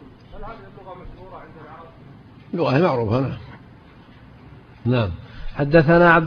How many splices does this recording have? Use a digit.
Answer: 0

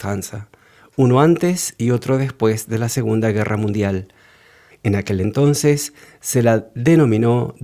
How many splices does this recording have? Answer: 1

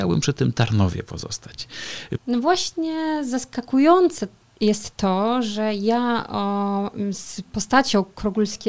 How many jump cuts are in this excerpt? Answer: 1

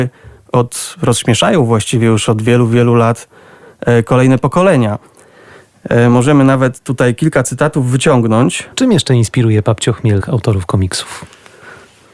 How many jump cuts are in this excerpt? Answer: 2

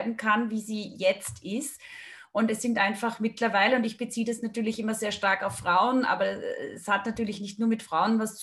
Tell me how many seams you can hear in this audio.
0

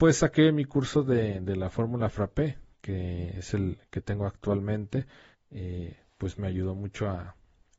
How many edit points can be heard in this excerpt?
2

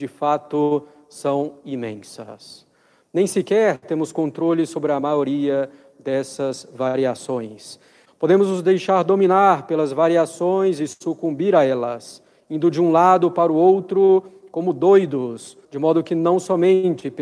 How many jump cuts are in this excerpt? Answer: 2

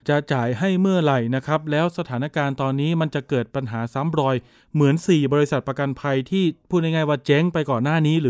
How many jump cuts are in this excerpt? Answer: 0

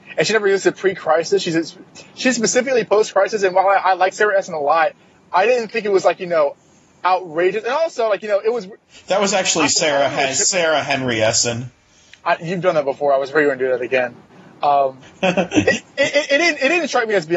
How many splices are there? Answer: 0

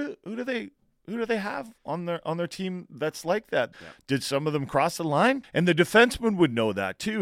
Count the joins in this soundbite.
2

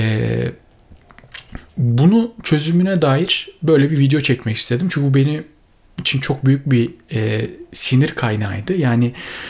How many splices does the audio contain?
1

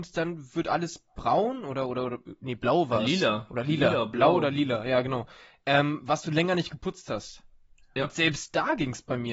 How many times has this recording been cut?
0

